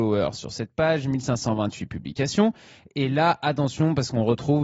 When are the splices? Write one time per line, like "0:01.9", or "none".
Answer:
none